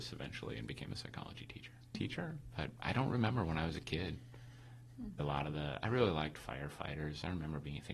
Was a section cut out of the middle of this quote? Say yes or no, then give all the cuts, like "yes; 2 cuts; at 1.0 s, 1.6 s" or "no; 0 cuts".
yes; 2 cuts; at 1.9 s, 5.2 s